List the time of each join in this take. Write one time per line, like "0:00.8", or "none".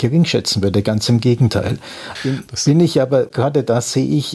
0:02.2